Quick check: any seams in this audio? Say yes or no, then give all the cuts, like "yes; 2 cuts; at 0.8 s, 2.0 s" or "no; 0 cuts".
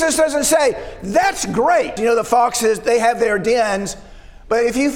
yes; 1 cut; at 2.0 s